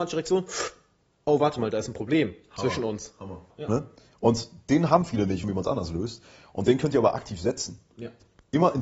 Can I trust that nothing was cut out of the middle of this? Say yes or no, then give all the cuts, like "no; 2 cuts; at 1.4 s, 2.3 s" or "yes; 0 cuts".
no; 2 cuts; at 3.5 s, 5.4 s